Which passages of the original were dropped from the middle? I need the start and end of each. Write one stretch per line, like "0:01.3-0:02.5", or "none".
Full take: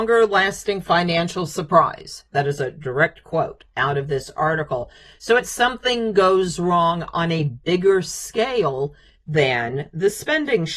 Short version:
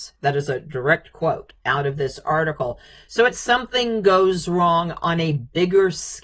none